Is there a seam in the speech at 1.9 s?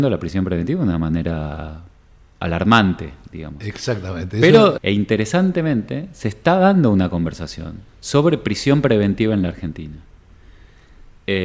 no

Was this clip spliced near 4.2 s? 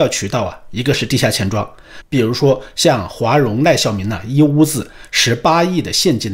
no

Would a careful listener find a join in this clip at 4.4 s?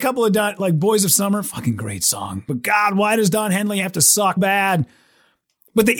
yes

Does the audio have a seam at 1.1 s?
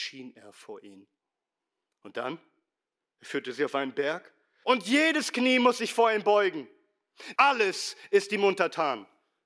no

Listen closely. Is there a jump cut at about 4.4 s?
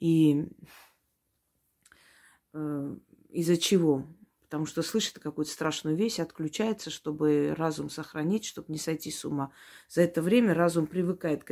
no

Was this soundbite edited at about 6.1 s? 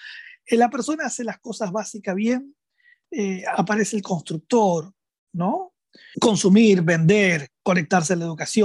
yes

